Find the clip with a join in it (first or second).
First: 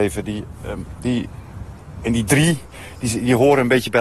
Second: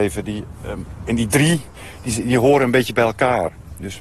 second